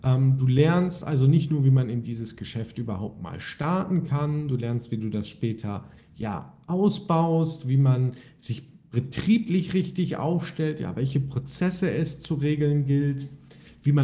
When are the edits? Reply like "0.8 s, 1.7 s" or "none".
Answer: none

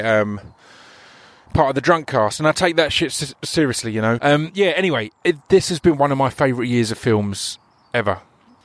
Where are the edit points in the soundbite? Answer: 4.2 s

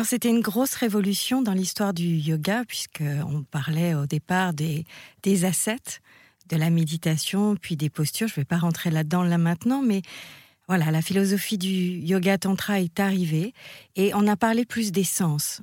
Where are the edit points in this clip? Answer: none

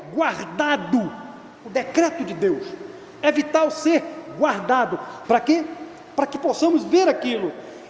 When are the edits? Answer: 1.6 s, 5.2 s

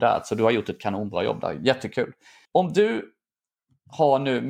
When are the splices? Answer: 2.4 s

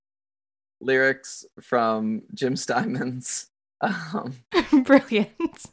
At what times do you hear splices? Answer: none

